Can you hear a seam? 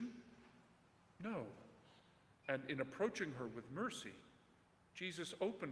yes; 1 cut; at 2.4 s

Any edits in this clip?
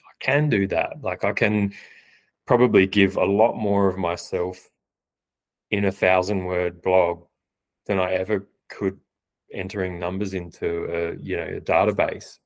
no; 0 cuts

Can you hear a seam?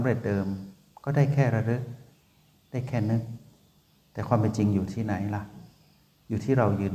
no; 0 cuts

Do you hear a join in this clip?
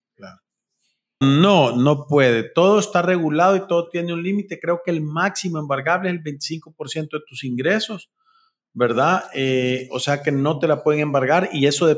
yes; 1 cut; at 1.2 s

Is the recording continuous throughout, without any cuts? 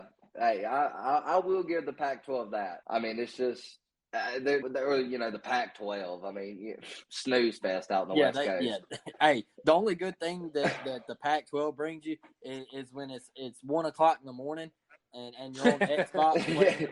no; 2 cuts; at 2.8 s, 4.6 s

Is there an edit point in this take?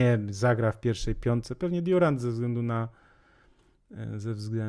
no; 0 cuts

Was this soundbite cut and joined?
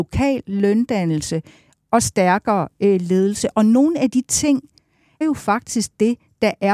yes; 1 cut; at 5.2 s

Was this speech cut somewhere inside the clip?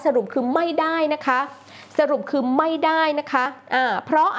no; 0 cuts

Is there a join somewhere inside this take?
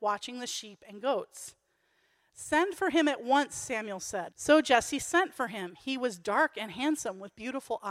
yes; 1 cut; at 4.3 s

